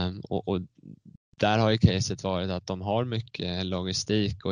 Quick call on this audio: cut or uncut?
uncut